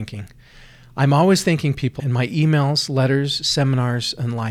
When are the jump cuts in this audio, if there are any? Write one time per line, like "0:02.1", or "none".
0:02.0